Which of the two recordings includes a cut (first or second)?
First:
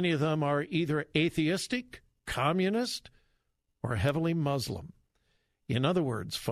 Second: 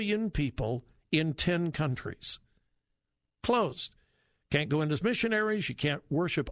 second